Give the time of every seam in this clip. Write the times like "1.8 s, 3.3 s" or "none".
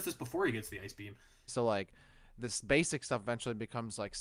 1.5 s